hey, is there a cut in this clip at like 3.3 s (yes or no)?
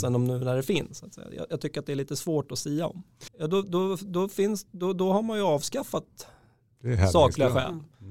yes